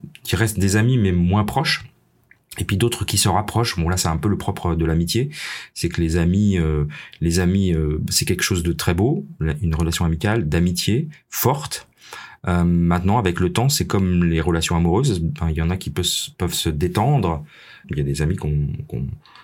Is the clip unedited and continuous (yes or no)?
no